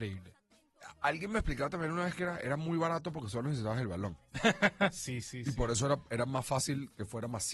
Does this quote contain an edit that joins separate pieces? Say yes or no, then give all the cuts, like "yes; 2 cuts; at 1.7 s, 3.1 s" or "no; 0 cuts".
no; 0 cuts